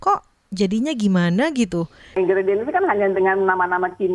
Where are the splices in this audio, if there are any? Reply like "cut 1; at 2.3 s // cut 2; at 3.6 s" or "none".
cut 1; at 2.1 s